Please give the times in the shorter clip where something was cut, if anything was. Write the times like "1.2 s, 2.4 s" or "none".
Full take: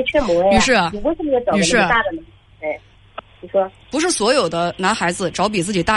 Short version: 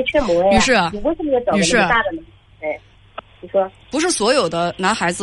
none